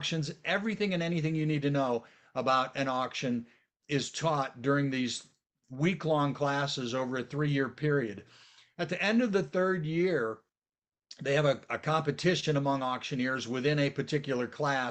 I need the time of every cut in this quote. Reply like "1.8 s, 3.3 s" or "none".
none